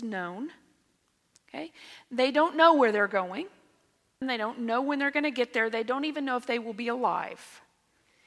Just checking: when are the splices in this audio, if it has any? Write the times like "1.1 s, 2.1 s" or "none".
4.2 s